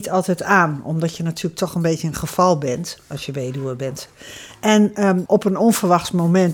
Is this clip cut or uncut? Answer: cut